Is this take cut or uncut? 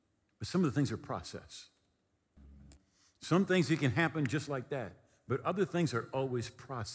uncut